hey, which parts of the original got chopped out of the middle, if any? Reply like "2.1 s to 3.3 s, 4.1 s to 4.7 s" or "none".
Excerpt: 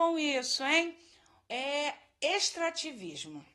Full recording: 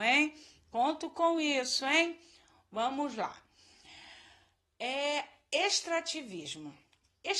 2.7 s to 4.7 s